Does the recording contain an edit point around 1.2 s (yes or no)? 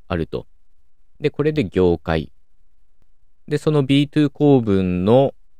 yes